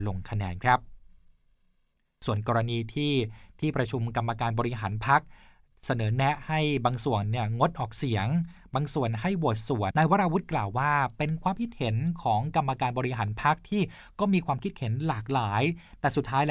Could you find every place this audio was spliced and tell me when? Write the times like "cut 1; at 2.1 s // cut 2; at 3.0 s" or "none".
cut 1; at 9.9 s